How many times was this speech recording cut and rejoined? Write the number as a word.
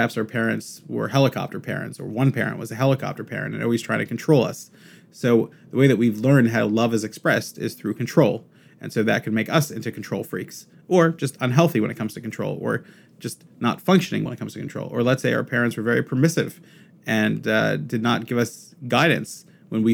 one